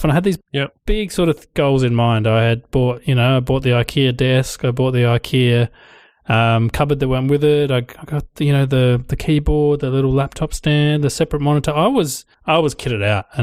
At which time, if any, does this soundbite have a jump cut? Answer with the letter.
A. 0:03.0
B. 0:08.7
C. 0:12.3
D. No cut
C